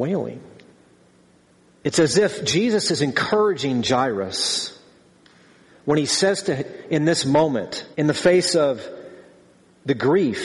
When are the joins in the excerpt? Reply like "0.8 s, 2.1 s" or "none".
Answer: 1.8 s, 7.9 s